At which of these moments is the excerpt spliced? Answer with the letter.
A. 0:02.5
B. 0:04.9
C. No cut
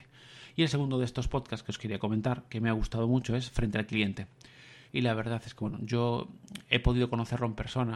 B